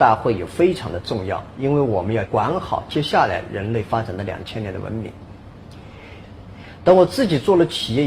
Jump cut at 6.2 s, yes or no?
yes